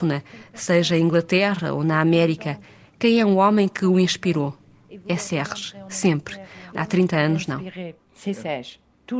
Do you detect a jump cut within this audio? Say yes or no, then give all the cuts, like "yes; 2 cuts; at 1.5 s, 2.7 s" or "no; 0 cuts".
yes; 1 cut; at 6.7 s